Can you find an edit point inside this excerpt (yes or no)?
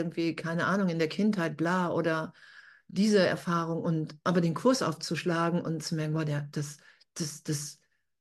no